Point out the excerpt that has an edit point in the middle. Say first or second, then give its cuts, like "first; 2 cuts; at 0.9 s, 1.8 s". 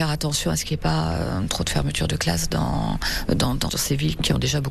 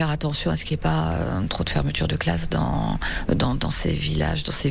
first; 1 cut; at 3.7 s